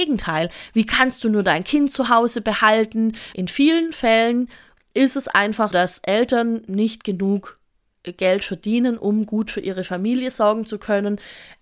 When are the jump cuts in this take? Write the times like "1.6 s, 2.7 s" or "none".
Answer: 3.3 s, 5.7 s